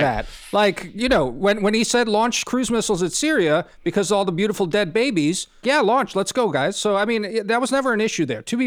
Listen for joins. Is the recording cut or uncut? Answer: cut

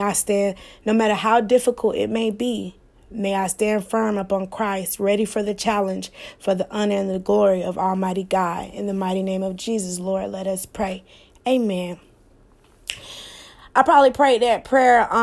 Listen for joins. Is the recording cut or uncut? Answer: uncut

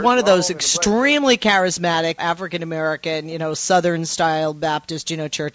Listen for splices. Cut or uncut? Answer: cut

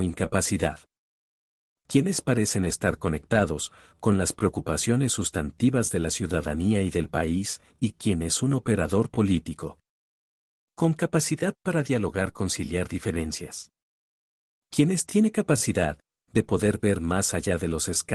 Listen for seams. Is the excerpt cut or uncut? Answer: uncut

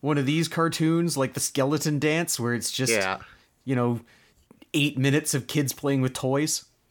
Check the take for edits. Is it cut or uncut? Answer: uncut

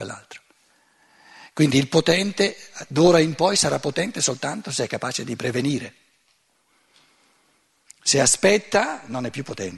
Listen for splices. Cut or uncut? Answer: uncut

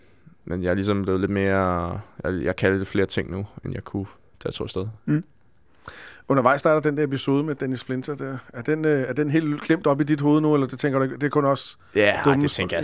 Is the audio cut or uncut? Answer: uncut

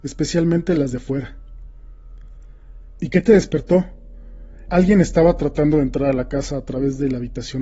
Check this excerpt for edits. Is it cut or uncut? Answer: cut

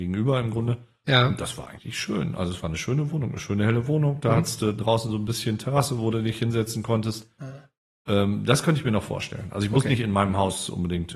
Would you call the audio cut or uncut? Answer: uncut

